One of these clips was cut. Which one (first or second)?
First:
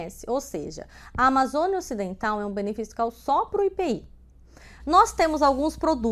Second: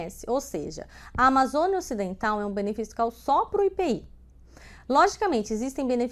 first